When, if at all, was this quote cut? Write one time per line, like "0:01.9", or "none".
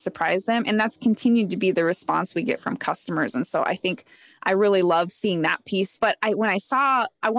0:06.0